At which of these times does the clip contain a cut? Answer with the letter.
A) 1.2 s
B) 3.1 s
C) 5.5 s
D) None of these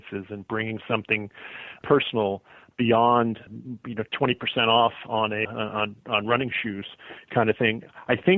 C